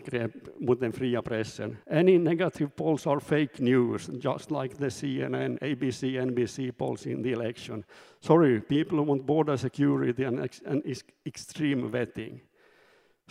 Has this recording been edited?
yes; 1 cut; at 1.8 s

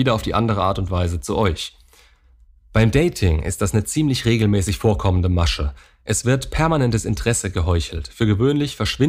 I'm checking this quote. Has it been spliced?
no; 0 cuts

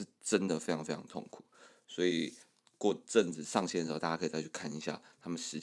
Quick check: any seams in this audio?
no; 0 cuts

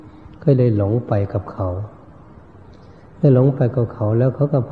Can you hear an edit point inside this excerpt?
no; 0 cuts

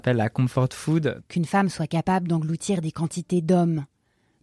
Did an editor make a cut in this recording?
yes; 1 cut; at 1.2 s

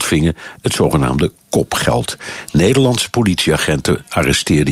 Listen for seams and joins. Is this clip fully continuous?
yes; 0 cuts

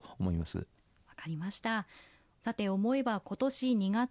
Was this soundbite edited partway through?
no; 0 cuts

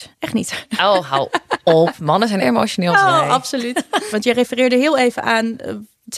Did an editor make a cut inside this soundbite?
yes; 2 cuts; at 2.4 s, 4.1 s

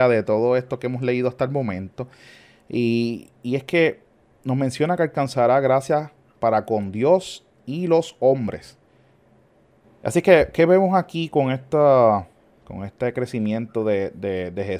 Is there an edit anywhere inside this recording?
yes; 1 cut; at 9.8 s

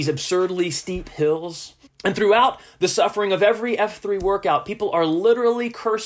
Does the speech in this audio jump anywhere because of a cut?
yes; 1 cut; at 1.9 s

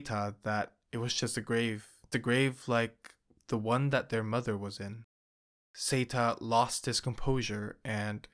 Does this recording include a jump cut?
yes; 1 cut; at 2.1 s

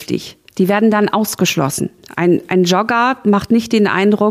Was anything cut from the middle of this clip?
no; 0 cuts

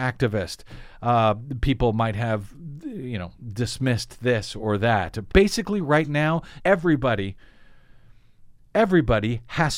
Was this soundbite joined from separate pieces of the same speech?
yes; 2 cuts; at 5.3 s, 6.6 s

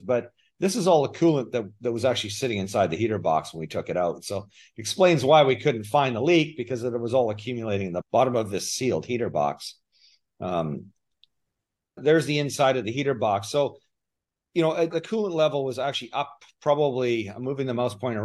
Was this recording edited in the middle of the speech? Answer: no; 0 cuts

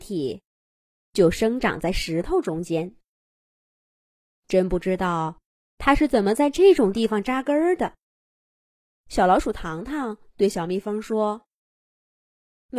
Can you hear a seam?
no; 0 cuts

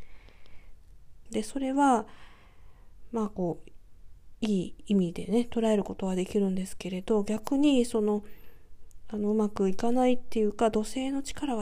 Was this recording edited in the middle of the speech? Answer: yes; 1 cut; at 1.3 s

